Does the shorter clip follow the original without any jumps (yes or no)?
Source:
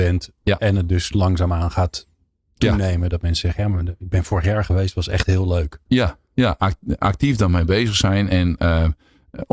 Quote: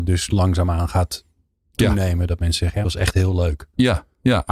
no